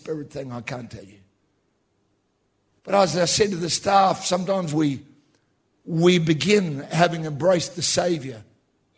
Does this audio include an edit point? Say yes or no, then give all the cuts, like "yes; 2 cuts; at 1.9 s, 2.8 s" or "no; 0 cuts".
no; 0 cuts